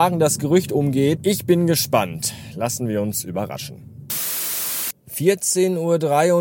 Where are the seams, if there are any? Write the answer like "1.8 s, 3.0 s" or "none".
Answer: 1.2 s